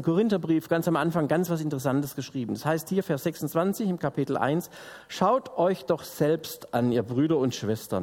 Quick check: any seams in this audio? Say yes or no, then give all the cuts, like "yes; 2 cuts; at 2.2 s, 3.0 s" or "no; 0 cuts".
no; 0 cuts